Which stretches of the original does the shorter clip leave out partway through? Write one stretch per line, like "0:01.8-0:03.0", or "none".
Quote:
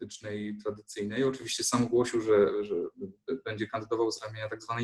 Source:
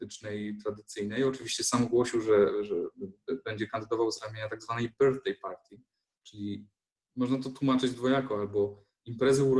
none